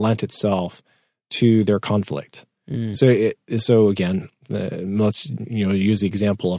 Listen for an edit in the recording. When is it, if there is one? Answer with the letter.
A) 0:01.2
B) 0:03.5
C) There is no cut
C